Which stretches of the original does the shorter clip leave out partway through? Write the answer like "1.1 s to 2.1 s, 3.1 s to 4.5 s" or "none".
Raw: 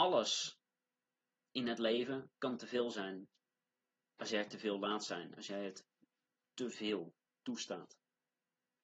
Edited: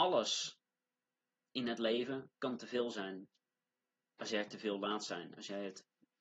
none